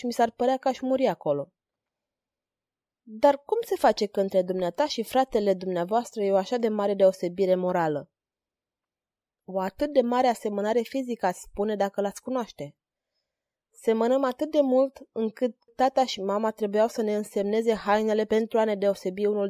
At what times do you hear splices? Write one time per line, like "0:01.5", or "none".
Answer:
0:13.6
0:15.7